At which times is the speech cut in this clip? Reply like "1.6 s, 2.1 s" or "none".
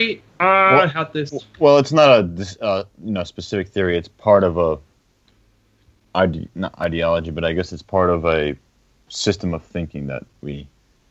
none